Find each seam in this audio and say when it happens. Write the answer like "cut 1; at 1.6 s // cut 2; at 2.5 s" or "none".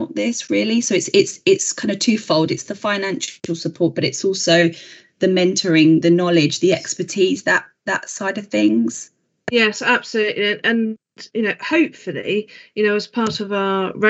none